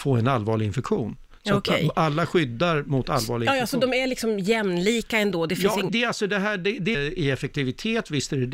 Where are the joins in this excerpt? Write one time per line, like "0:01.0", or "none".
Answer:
0:05.9
0:06.9